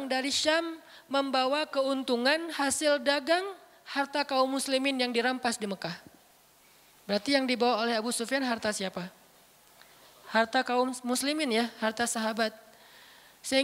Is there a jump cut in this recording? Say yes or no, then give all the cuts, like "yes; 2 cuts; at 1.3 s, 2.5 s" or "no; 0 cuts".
no; 0 cuts